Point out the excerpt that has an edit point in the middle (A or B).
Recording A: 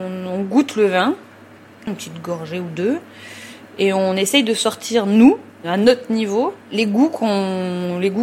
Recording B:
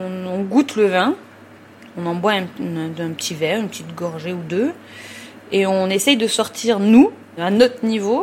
A